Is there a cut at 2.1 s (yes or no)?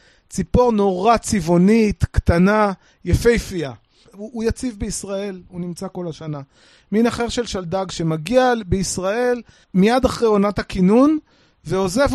no